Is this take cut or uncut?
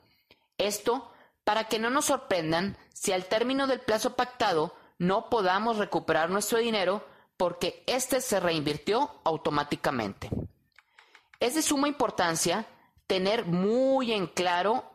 uncut